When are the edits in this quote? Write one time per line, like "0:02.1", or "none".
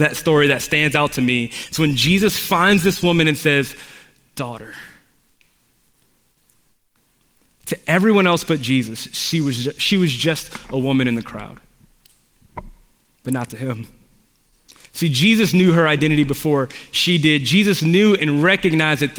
none